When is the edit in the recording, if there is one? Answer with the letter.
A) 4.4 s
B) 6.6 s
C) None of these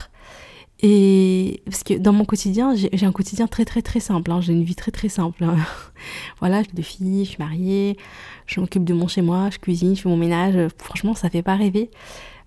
B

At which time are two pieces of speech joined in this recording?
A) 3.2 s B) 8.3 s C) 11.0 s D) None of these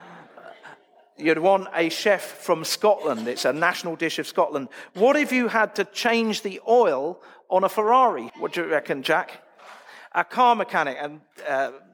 B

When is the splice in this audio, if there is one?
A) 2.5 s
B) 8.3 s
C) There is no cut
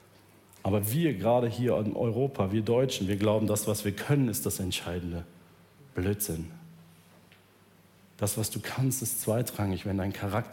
C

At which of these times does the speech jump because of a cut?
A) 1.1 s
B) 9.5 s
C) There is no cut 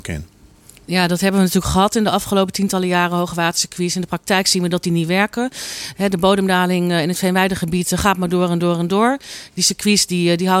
C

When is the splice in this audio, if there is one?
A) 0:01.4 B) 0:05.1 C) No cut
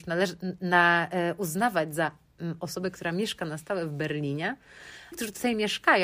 B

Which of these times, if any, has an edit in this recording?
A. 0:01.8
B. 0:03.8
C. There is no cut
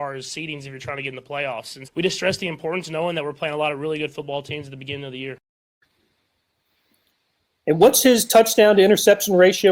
A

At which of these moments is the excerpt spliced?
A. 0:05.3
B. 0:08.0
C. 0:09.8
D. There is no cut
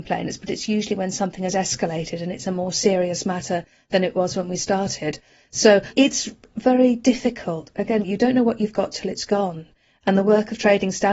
B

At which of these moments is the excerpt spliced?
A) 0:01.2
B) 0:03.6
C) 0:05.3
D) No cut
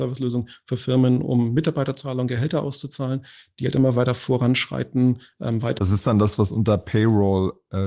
D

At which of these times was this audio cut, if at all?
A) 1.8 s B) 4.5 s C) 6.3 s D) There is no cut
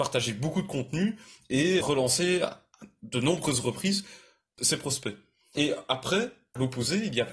A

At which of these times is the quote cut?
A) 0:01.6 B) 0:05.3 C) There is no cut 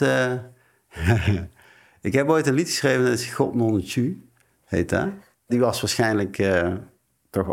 B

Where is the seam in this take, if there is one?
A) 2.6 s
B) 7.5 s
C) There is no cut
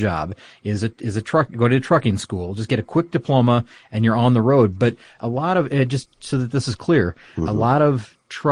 C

